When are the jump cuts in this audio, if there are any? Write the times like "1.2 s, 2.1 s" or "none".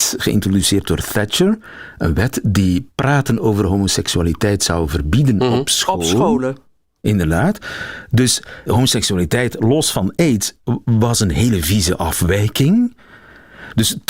8.7 s